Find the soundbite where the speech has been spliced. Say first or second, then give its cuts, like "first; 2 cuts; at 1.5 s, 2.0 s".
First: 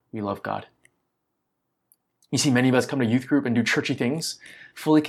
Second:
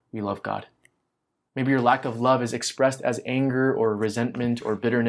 second; 1 cut; at 1.5 s